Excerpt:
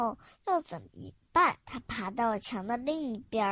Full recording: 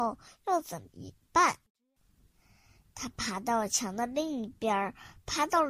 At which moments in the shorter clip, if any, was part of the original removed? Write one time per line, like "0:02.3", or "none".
0:01.6